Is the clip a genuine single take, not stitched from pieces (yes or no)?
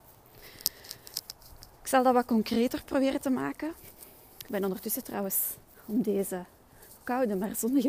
yes